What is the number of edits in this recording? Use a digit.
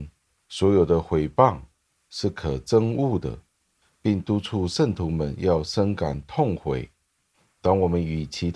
0